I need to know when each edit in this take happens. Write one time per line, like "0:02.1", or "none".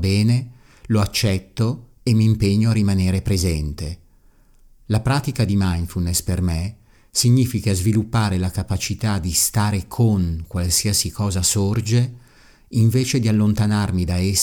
none